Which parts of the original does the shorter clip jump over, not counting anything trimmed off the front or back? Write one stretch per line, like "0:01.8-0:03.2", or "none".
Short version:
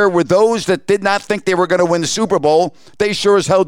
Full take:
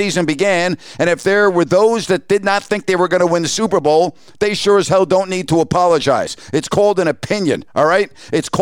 none